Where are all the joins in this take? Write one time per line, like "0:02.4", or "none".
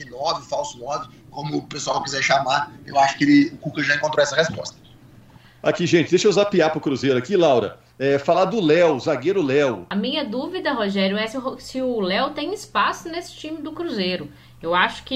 0:09.9

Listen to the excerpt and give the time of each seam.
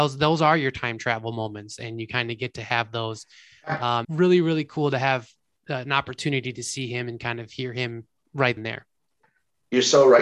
0:04.0
0:08.6

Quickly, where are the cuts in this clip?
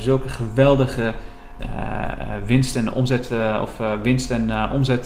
0:01.6

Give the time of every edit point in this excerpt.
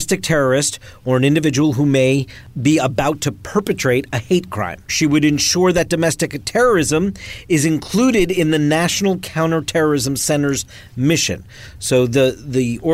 0:04.9

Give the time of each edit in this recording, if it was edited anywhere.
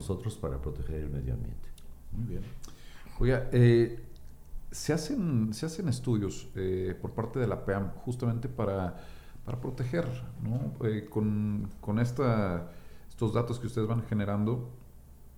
none

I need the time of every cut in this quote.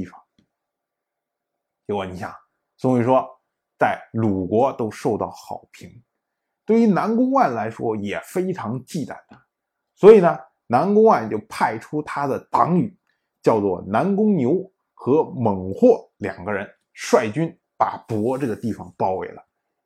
none

